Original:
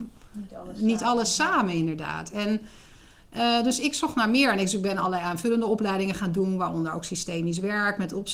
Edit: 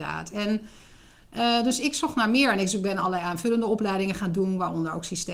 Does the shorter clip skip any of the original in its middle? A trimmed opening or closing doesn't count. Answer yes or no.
no